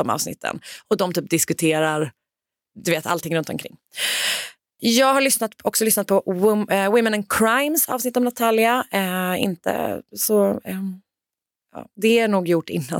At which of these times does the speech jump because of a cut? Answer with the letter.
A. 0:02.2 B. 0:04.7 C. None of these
C